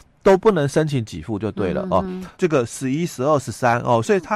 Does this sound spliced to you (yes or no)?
yes